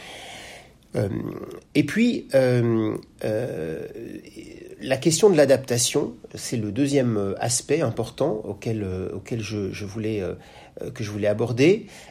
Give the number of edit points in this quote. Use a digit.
1